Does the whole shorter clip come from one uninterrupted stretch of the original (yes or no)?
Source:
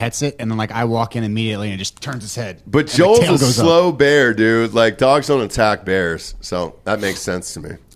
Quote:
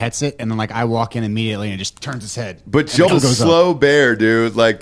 no